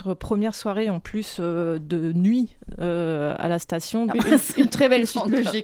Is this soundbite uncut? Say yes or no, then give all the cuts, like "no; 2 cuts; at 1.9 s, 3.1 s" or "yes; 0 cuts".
no; 1 cut; at 4.1 s